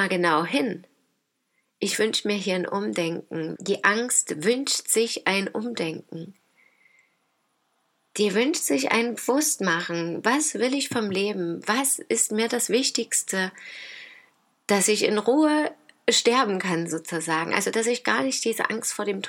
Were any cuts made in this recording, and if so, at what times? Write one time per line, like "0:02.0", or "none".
0:03.6